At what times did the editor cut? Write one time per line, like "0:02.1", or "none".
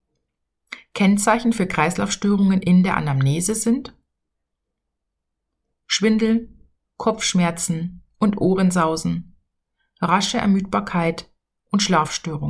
0:06.9